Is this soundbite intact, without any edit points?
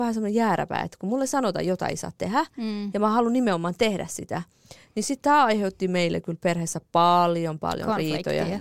yes; 0 cuts

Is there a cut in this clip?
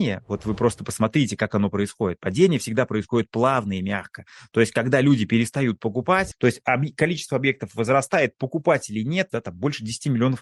yes; 2 cuts; at 6.3 s, 9.3 s

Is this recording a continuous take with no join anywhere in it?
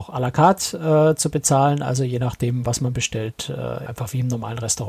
no; 1 cut; at 3.9 s

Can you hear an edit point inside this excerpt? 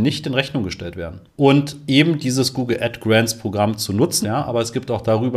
yes; 2 cuts; at 1.3 s, 4.2 s

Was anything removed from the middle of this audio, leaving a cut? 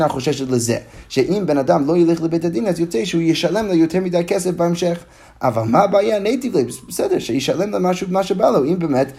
no; 0 cuts

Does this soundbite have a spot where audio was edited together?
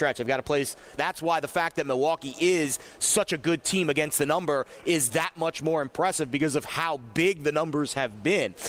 yes; 2 cuts; at 1.0 s, 5.1 s

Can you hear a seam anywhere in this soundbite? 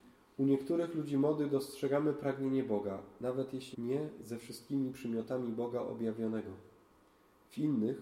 yes; 1 cut; at 3.7 s

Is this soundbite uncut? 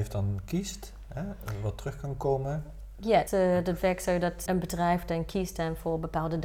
no; 2 cuts; at 3.3 s, 4.5 s

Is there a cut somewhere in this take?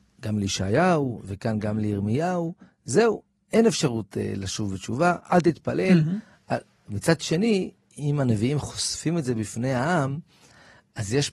no; 0 cuts

